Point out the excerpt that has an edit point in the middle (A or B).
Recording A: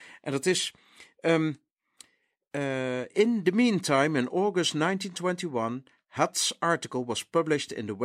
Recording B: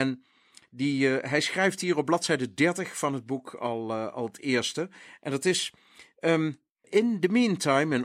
B